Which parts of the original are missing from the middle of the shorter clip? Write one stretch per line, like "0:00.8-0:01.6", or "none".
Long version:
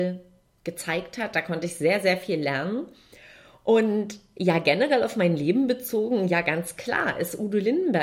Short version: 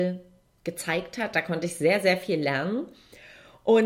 none